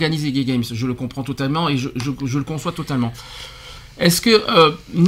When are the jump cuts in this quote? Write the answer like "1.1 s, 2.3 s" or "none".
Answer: none

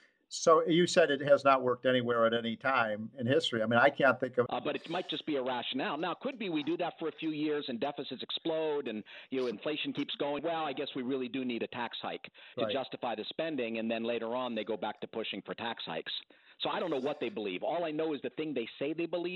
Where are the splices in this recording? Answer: 4.5 s, 10.4 s, 12.5 s

